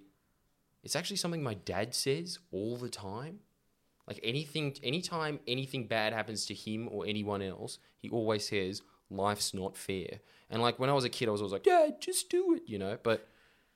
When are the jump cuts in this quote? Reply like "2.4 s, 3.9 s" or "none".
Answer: 11.6 s